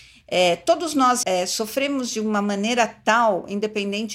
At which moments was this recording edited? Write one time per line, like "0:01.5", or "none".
0:01.2

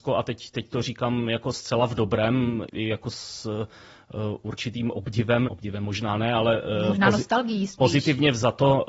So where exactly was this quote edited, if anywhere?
0:02.7
0:05.5

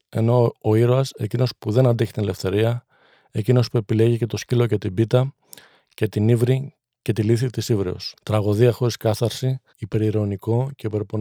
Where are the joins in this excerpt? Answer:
0:08.2
0:09.7

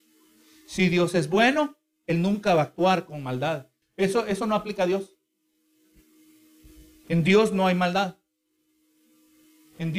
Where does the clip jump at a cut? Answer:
0:03.8

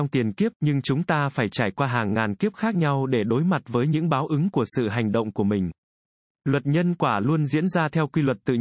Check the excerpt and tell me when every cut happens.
0:06.4

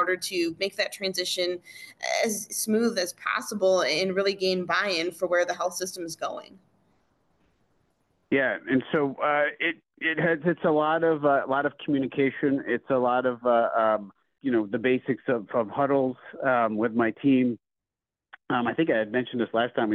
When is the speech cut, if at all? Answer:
none

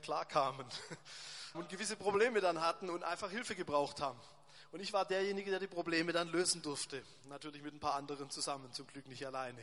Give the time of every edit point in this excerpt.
0:01.5

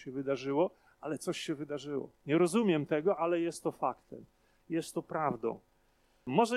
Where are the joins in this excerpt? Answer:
0:02.2

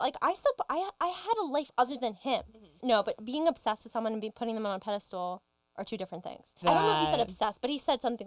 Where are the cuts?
0:02.8
0:06.6

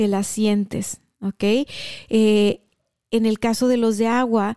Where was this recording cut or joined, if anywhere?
none

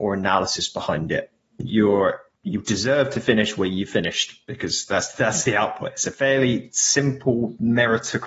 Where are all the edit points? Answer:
none

